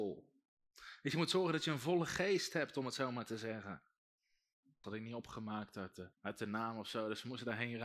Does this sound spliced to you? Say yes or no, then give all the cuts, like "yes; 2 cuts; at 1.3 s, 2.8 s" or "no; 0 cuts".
yes; 2 cuts; at 4.8 s, 6.1 s